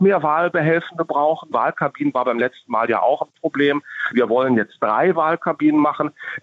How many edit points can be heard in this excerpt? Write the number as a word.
two